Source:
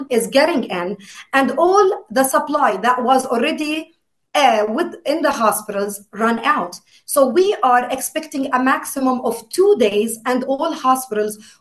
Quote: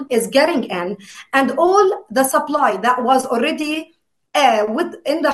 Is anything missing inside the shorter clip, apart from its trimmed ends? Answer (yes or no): no